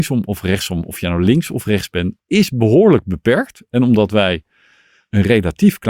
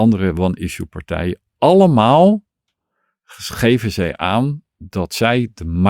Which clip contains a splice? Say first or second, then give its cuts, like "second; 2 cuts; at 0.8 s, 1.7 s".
first; 1 cut; at 2.2 s